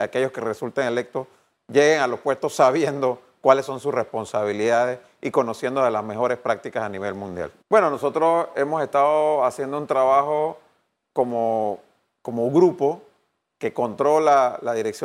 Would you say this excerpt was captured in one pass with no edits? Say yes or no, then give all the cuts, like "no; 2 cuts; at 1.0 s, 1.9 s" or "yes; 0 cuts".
no; 1 cut; at 7.6 s